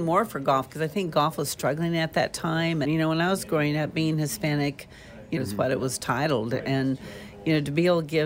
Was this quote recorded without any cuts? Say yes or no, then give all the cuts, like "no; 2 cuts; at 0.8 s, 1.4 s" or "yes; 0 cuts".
no; 2 cuts; at 2.8 s, 5.4 s